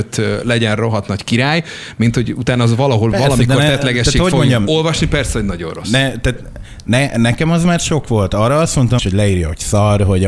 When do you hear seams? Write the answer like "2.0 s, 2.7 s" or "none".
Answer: 9.0 s